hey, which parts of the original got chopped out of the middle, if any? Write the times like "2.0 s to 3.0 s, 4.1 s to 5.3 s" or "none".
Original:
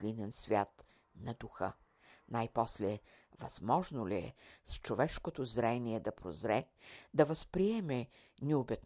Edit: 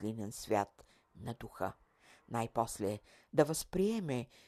3.3 s to 7.1 s